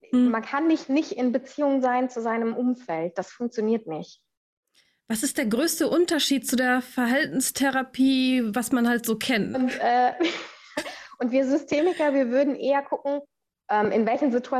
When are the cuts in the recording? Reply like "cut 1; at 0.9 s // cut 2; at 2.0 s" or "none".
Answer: cut 1; at 9.5 s